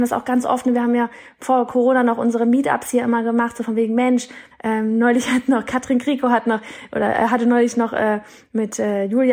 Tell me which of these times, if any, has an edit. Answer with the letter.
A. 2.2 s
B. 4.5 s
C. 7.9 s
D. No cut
B